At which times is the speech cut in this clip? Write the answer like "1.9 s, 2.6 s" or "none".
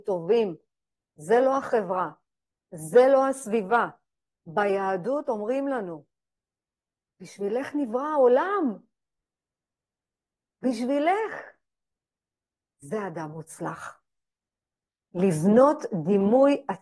none